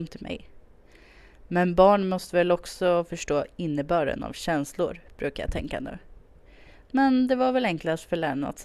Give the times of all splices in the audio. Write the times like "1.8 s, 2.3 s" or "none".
none